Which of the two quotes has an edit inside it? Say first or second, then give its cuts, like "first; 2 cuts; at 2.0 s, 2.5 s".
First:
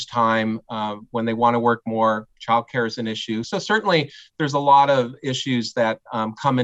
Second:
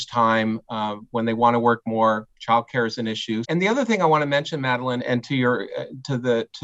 second; 2 cuts; at 3.4 s, 5.0 s